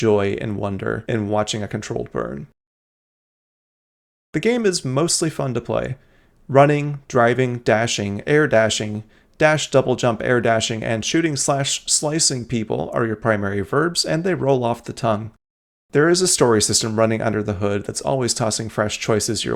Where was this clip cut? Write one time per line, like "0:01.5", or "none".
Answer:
none